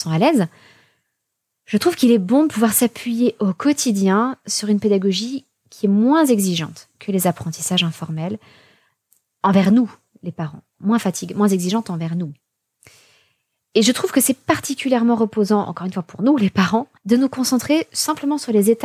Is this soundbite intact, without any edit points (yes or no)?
no